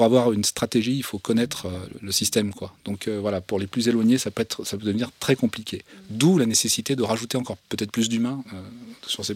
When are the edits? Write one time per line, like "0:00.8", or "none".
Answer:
none